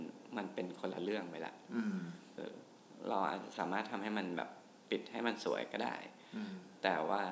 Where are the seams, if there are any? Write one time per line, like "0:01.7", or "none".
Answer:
0:02.4